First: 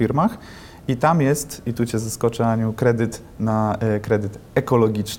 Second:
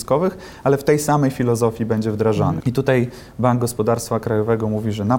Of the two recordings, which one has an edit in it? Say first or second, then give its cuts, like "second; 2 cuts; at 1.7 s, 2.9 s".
second; 1 cut; at 2.6 s